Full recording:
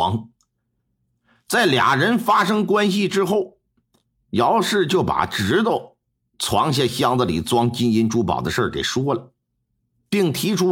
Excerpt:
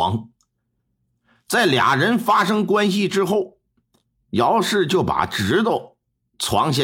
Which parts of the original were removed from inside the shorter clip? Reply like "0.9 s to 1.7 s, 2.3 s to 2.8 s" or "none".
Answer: none

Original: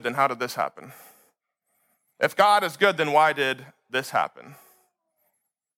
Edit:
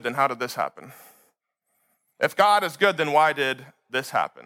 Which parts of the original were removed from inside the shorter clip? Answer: none

